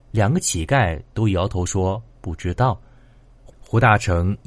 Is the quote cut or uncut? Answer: uncut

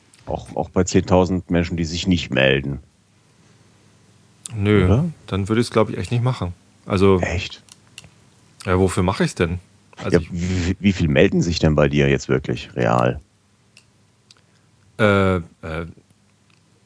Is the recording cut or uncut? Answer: uncut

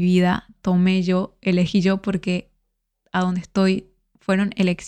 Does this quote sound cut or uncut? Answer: uncut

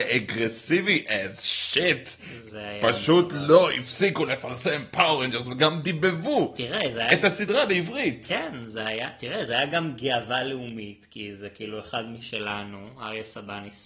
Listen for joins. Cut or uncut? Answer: uncut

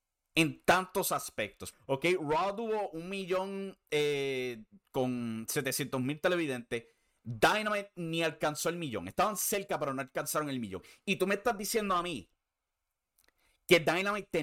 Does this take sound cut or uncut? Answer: cut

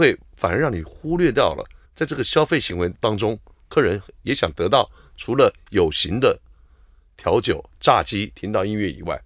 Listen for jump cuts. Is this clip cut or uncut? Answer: cut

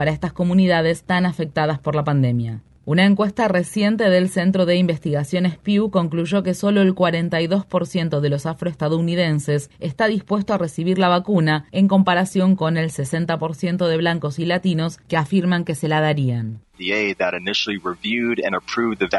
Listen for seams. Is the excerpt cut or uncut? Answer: cut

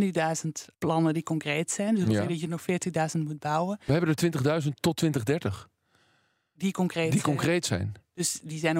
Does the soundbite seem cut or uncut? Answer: uncut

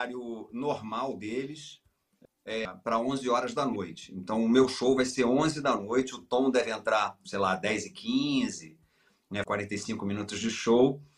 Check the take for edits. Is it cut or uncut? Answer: cut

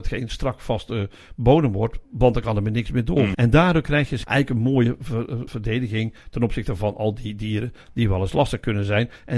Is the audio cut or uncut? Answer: cut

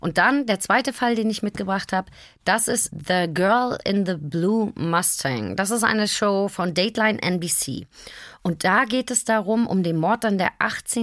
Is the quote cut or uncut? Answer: uncut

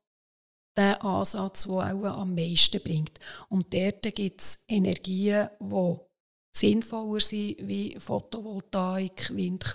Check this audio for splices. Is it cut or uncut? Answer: uncut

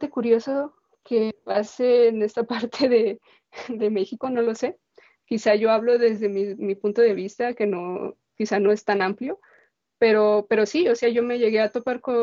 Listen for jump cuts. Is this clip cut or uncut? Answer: uncut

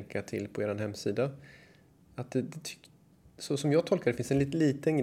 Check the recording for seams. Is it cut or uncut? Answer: uncut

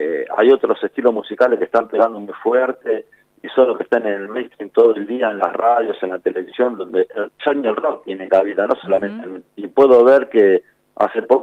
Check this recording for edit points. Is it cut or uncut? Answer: cut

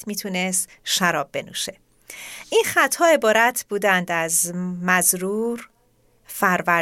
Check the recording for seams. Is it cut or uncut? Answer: uncut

